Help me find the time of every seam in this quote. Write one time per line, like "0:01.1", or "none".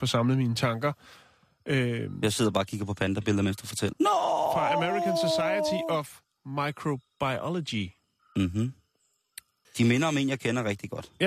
0:03.9
0:09.6